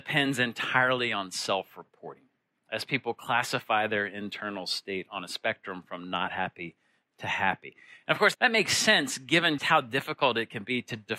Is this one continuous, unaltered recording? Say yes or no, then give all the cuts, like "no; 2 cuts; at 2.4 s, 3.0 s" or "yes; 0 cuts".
no; 2 cuts; at 8.3 s, 9.6 s